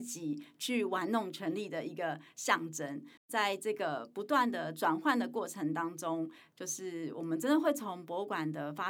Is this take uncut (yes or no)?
no